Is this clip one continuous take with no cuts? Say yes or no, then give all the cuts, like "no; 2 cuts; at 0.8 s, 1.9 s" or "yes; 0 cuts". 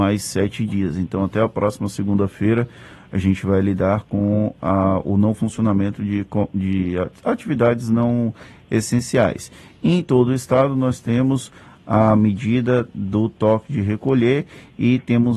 yes; 0 cuts